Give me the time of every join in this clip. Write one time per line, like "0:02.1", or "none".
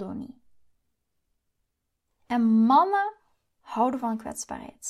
0:02.1